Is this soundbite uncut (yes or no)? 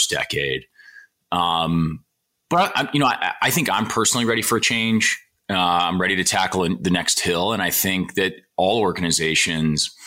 yes